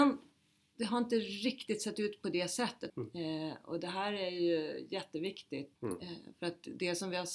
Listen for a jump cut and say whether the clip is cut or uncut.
cut